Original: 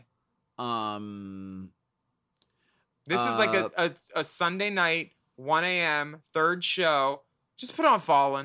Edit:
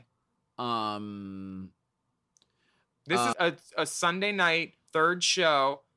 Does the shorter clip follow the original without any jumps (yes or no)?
no